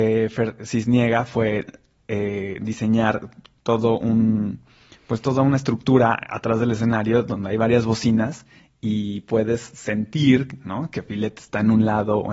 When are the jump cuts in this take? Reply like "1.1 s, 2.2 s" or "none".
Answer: none